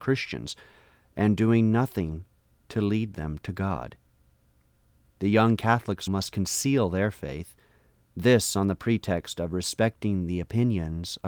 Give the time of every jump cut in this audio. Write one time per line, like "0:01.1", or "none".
0:06.1